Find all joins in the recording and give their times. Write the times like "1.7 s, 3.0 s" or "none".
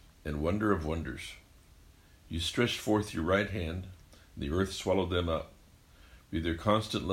none